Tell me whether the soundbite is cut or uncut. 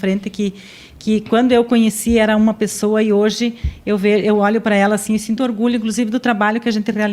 cut